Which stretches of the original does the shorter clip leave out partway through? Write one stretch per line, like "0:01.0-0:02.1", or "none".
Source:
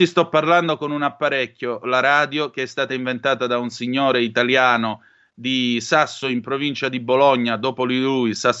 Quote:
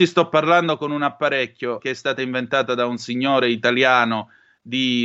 0:01.8-0:02.5